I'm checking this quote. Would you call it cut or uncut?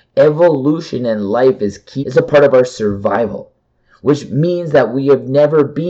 cut